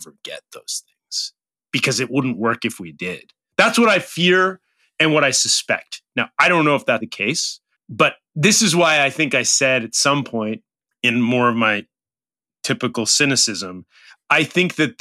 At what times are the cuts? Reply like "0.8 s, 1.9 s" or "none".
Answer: 7.0 s